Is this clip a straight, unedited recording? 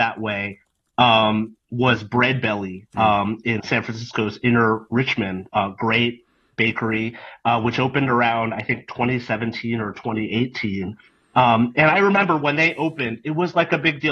yes; 0 cuts

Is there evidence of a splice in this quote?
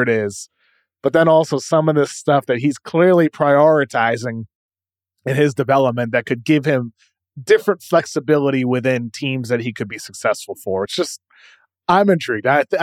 no; 0 cuts

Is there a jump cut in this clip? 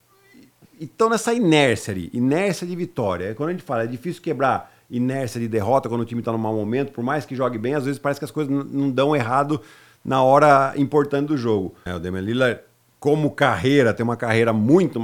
yes; 1 cut; at 11.9 s

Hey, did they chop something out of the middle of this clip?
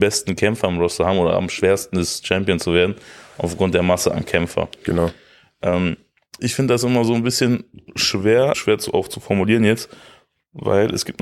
yes; 2 cuts; at 6.4 s, 8.5 s

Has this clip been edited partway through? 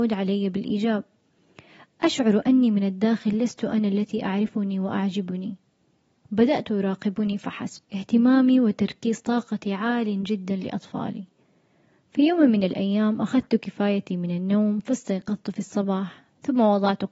yes; 1 cut; at 7.8 s

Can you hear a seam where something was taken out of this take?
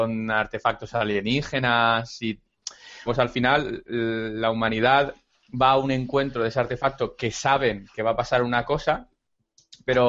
yes; 1 cut; at 3.1 s

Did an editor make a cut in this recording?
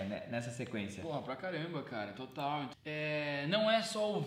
yes; 1 cut; at 2.7 s

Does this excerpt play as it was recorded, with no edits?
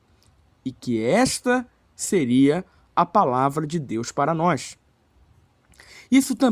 yes; 0 cuts

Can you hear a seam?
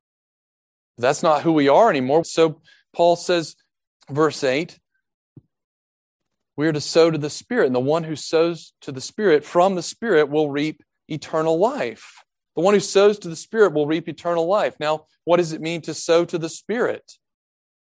yes; 2 cuts; at 2.2 s, 4.0 s

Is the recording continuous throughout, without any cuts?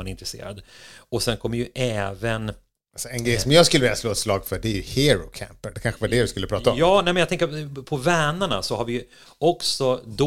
yes; 0 cuts

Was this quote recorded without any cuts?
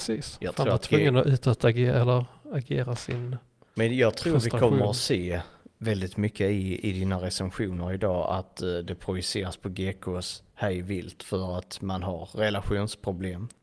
yes; 0 cuts

